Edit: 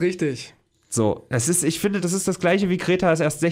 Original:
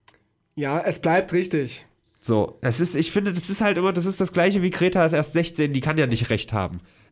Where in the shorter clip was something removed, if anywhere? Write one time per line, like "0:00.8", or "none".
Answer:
0:02.0